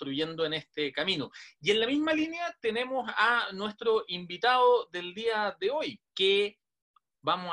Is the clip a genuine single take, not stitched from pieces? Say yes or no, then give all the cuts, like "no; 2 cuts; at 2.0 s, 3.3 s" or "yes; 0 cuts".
no; 1 cut; at 6.1 s